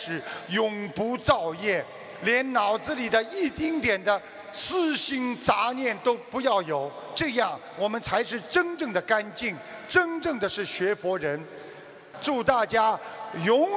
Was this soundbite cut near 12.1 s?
yes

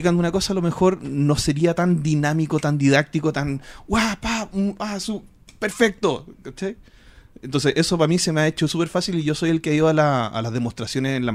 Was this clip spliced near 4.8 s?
no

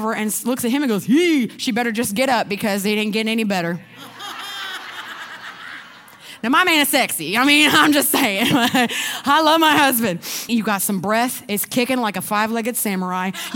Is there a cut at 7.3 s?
no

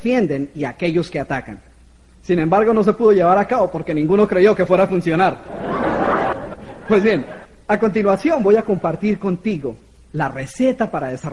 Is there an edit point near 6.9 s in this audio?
no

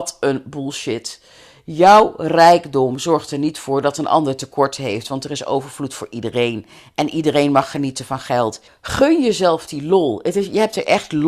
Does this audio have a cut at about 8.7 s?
yes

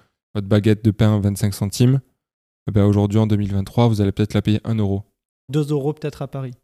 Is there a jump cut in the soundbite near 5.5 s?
yes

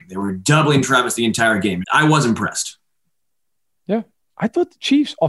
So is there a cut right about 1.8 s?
yes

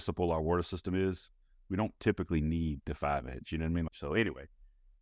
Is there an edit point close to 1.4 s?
no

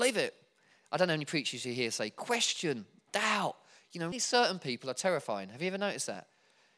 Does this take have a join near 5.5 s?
no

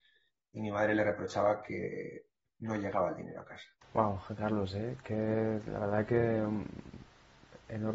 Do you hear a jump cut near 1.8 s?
no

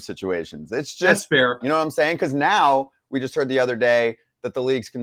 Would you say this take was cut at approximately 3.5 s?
no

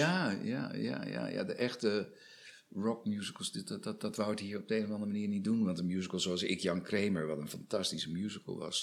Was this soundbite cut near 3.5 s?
no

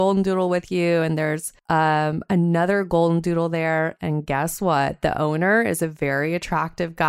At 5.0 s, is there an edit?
no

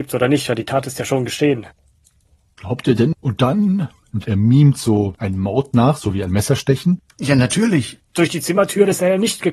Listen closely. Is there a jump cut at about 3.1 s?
yes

